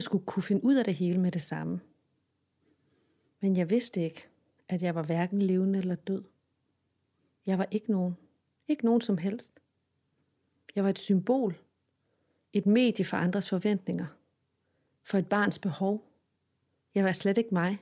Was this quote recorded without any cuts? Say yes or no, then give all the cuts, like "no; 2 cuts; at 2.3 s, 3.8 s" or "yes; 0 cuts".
yes; 0 cuts